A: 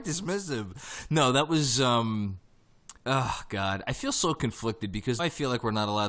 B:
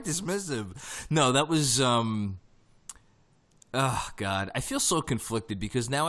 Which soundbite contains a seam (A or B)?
A